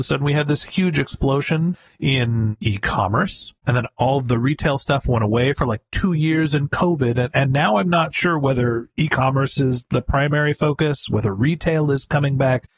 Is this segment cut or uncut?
uncut